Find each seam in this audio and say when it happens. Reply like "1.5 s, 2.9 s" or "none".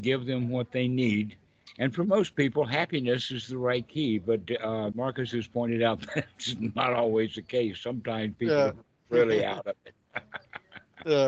none